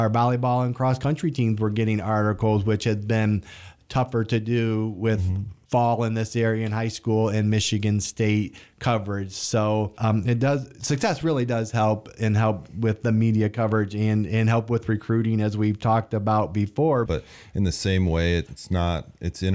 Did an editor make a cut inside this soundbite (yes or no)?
yes